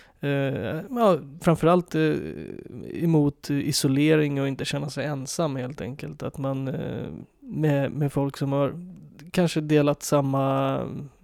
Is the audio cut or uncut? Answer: cut